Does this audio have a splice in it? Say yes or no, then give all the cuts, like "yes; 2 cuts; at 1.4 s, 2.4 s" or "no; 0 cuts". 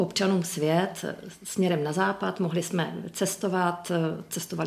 no; 0 cuts